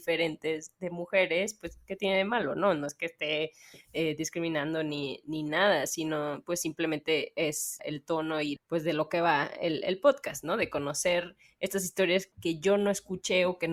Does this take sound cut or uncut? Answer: uncut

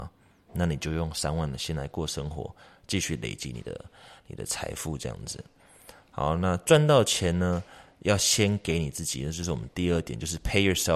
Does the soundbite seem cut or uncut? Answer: uncut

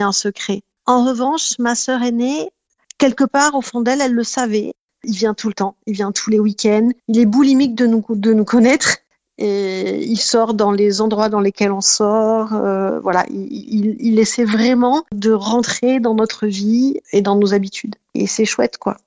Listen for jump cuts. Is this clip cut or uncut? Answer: cut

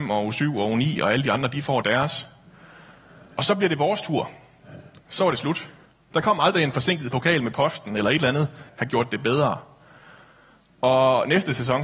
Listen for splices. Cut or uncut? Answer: cut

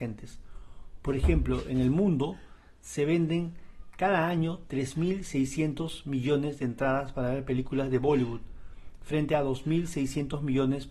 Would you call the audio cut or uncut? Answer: uncut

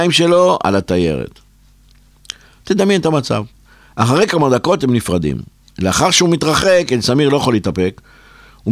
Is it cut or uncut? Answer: uncut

